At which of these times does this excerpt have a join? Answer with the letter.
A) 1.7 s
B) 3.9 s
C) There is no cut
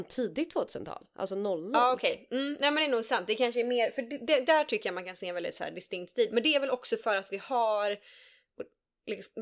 C